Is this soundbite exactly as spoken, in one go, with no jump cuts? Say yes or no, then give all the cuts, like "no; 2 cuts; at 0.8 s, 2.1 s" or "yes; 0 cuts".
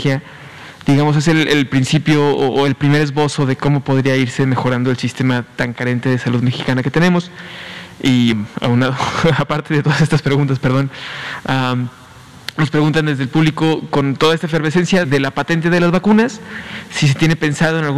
no; 2 cuts; at 8.3 s, 15.0 s